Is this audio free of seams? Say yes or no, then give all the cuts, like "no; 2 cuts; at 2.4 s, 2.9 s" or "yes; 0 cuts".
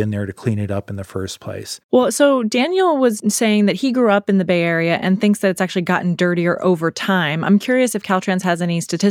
yes; 0 cuts